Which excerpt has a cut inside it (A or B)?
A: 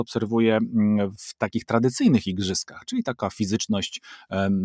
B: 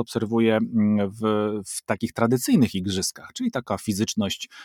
A